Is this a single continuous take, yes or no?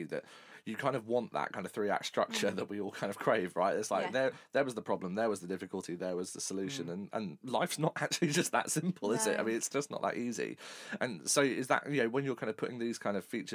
yes